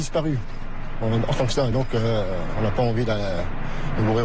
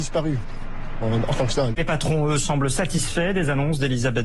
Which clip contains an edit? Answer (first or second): second